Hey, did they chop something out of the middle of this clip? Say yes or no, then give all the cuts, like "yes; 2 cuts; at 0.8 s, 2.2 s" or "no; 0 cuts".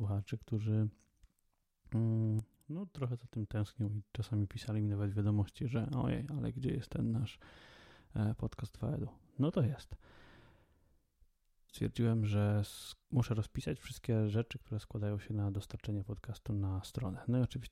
yes; 2 cuts; at 11.7 s, 13.0 s